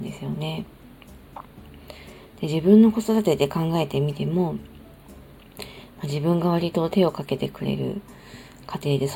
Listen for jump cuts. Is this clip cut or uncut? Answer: uncut